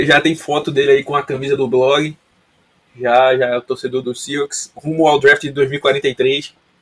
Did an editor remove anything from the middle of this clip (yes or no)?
yes